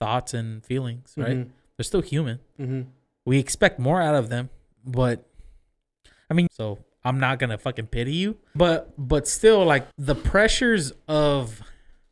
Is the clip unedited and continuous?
no; 3 cuts; at 6.5 s, 8.6 s, 9.9 s

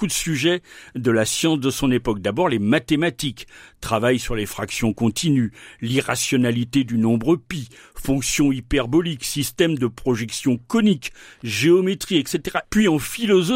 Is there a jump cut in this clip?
yes; 1 cut; at 12.6 s

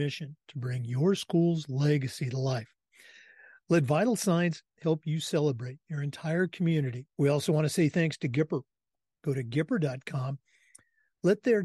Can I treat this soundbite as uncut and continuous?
no; 1 cut; at 7.1 s

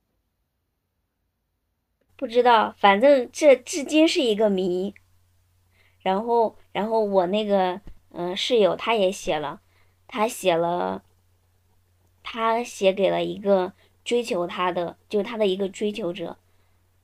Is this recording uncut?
yes; 0 cuts

